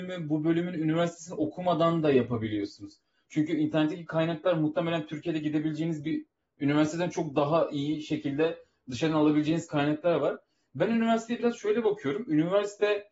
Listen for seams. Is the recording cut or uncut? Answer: cut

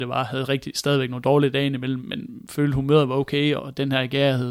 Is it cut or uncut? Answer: cut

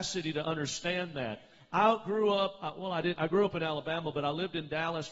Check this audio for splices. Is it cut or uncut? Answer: uncut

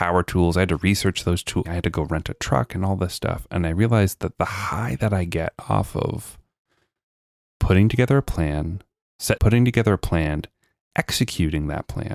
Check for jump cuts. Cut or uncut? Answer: cut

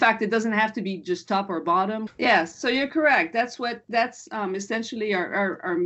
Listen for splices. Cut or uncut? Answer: cut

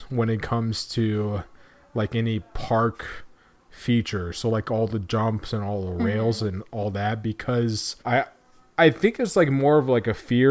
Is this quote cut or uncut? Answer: cut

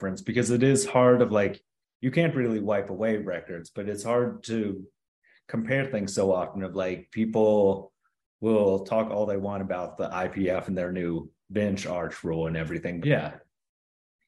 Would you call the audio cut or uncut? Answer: cut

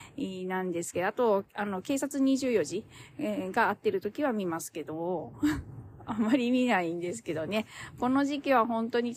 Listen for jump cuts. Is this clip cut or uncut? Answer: uncut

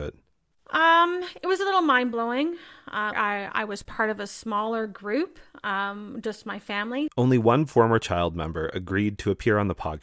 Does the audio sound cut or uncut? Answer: cut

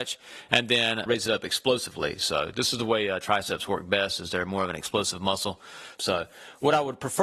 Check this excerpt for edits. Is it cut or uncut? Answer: cut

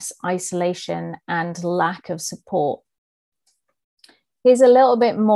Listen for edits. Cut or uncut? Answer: uncut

